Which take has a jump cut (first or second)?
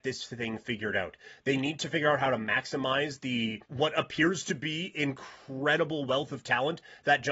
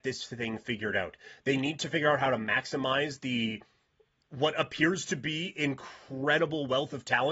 first